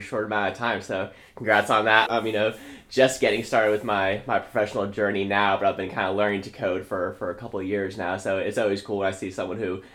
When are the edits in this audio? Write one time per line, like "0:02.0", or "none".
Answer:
0:02.1